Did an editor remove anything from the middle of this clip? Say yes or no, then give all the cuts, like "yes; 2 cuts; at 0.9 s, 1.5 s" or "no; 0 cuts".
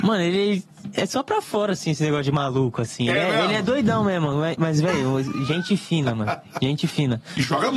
no; 0 cuts